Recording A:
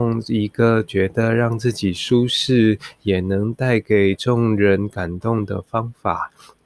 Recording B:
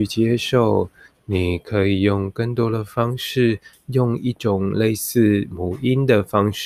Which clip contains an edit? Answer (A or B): B